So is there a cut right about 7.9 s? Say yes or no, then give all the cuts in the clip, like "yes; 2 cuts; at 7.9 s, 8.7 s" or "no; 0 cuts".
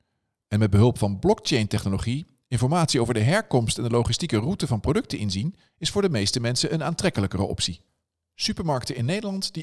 no; 0 cuts